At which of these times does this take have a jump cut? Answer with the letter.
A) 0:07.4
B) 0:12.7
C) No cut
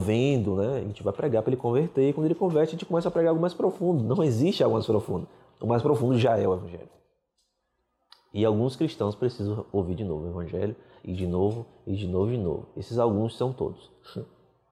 C